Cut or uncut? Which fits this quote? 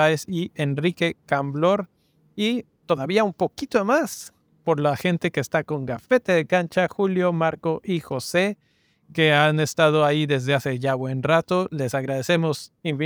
uncut